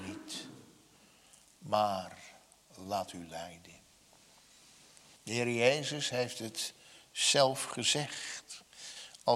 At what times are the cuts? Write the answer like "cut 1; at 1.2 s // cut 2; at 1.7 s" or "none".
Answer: cut 1; at 5.1 s